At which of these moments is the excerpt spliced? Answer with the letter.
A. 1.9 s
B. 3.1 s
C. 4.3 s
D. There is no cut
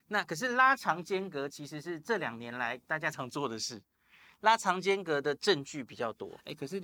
B